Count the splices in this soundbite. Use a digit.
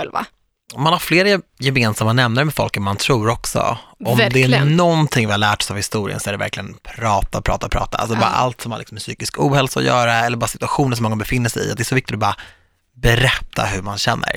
0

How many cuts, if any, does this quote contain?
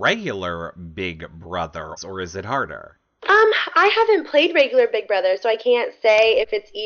1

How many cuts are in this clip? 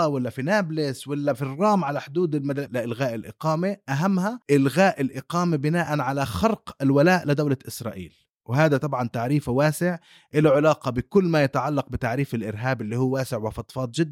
2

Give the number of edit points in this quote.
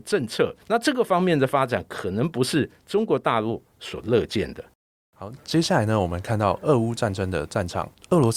0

